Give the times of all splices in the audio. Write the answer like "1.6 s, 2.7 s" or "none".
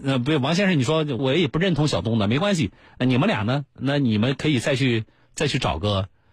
1.2 s